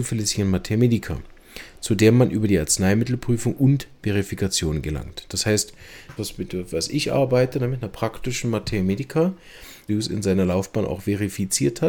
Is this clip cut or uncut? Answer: cut